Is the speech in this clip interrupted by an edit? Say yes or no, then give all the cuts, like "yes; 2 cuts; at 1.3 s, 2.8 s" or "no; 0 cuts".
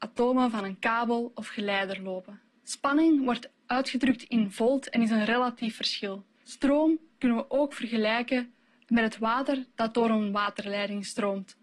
yes; 2 cuts; at 2.5 s, 6.4 s